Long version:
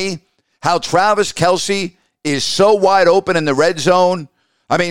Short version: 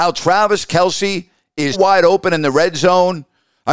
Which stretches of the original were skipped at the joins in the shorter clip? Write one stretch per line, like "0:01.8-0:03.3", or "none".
0:02.4-0:02.8